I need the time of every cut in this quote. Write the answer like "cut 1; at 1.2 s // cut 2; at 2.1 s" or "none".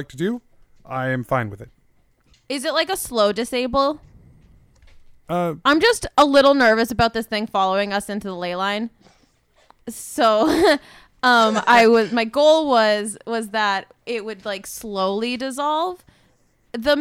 cut 1; at 2.3 s